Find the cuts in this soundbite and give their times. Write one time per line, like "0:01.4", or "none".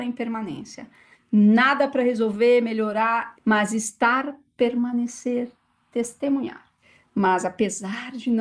0:01.1
0:03.3